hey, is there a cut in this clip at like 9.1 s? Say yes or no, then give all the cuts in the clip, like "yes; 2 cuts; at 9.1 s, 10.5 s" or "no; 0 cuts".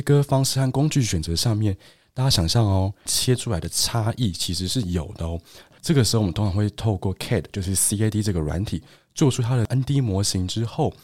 no; 2 cuts; at 3.1 s, 5.8 s